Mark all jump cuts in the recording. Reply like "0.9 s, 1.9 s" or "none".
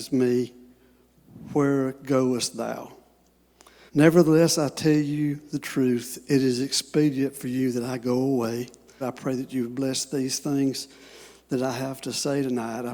3.9 s, 9.0 s